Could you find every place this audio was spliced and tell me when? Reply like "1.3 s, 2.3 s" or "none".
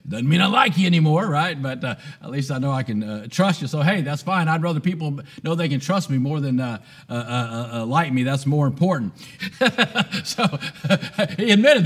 9.4 s